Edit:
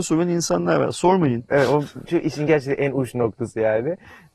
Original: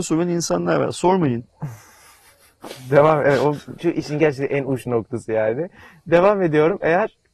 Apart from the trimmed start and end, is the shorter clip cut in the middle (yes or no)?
yes